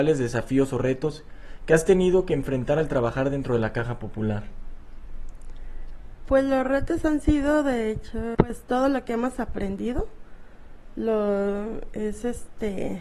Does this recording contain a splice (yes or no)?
yes